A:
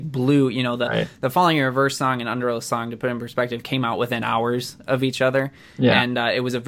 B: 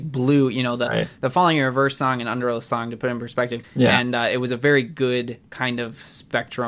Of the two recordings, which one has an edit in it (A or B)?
B